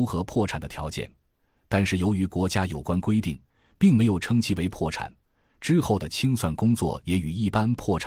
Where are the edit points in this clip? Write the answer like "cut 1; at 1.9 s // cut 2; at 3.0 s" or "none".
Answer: none